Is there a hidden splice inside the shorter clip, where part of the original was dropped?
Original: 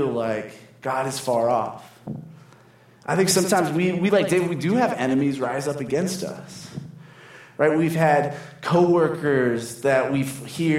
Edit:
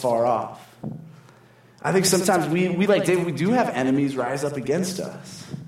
no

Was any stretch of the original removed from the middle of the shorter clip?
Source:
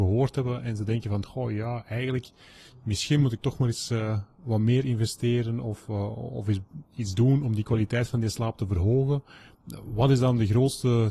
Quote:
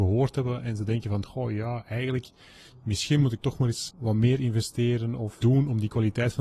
yes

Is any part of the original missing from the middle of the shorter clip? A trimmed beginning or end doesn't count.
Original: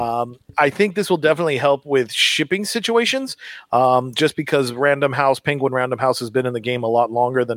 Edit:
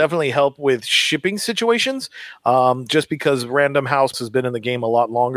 yes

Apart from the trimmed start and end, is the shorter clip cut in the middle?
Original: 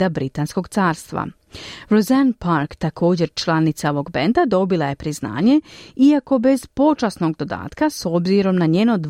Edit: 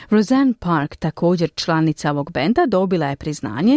no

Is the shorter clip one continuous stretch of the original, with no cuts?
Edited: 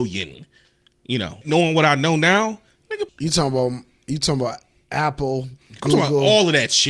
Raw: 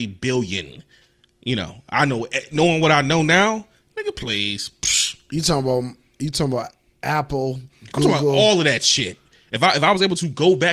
no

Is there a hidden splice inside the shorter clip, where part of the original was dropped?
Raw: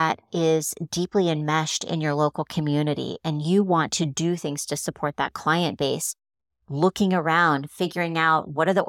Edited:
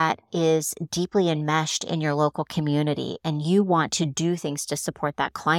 no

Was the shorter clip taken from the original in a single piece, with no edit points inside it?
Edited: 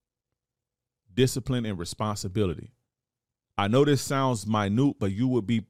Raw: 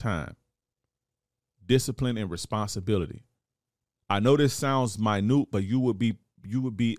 yes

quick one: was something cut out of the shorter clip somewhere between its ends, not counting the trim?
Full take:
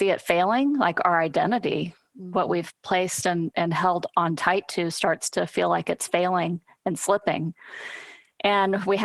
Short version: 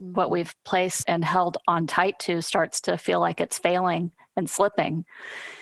yes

